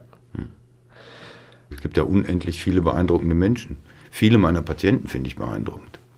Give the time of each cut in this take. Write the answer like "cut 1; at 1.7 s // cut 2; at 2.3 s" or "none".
cut 1; at 1.7 s

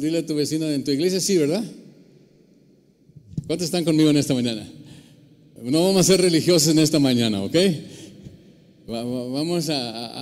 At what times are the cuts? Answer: cut 1; at 5.6 s

